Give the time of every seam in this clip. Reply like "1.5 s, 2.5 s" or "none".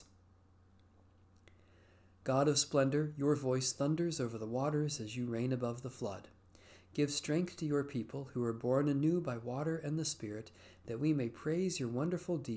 none